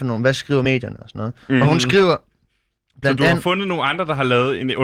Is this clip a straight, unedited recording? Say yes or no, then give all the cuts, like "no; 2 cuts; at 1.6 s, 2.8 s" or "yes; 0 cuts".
yes; 0 cuts